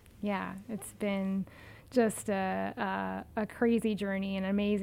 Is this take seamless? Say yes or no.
yes